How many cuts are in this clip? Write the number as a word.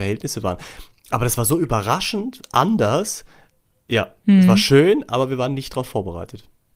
zero